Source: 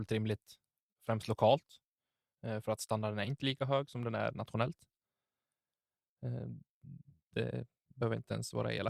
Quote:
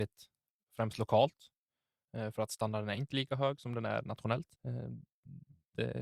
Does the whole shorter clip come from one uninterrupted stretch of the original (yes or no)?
no